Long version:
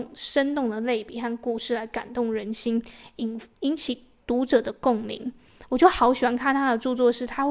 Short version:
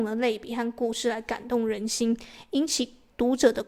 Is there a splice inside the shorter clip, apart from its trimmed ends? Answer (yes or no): yes